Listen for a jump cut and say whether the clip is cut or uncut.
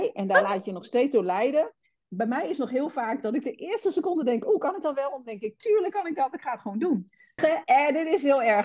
cut